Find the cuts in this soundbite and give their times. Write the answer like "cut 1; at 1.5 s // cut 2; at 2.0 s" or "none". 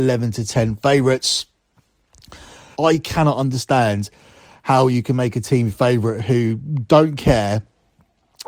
cut 1; at 2.7 s